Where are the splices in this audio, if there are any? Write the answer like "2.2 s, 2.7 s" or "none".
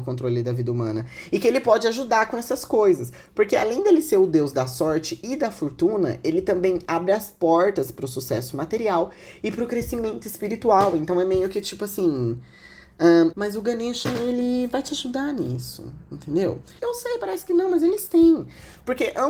13.3 s, 16.8 s